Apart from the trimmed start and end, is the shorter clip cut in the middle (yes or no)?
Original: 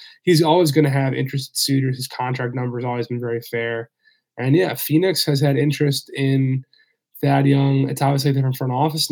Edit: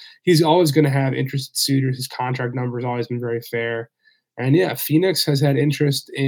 no